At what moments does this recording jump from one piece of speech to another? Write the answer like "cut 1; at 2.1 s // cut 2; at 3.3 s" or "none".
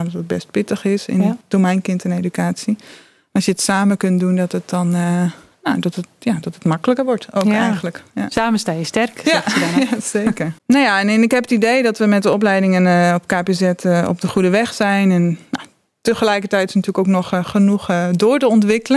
cut 1; at 10.6 s